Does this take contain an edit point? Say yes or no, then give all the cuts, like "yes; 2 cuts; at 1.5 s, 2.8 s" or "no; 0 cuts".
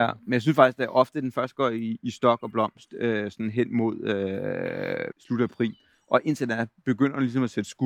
yes; 1 cut; at 5.1 s